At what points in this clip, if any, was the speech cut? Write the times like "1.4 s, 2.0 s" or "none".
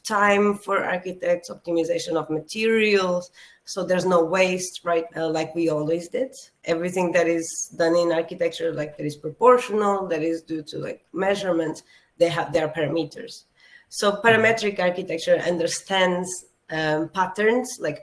5.1 s